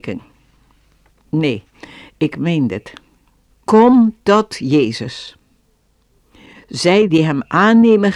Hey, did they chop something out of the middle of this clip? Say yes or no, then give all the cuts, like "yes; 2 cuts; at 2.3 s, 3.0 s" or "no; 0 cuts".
yes; 2 cuts; at 1.1 s, 3.5 s